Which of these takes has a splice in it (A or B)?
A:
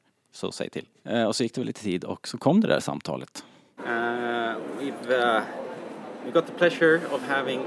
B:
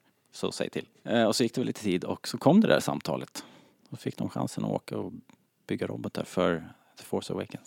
A